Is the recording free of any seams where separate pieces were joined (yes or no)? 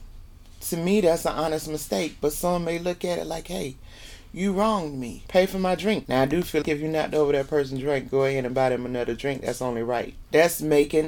no